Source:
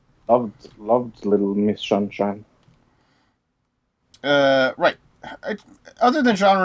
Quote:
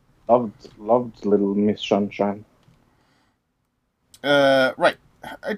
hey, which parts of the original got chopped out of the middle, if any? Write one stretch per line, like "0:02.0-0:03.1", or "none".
none